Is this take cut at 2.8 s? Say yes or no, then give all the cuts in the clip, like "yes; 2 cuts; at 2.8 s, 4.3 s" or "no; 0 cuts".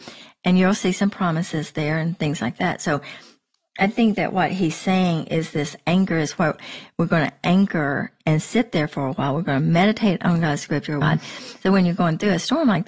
no; 1 cut; at 11.0 s